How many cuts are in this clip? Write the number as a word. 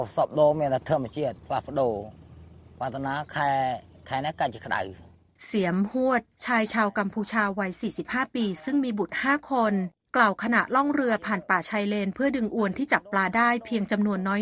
one